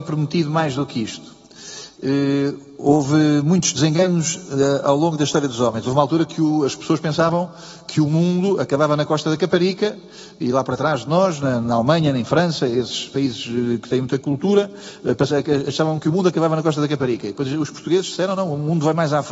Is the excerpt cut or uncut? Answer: uncut